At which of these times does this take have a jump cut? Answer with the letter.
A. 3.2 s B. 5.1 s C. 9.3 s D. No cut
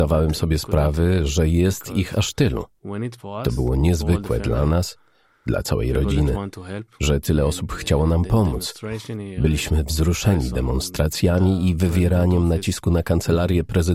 A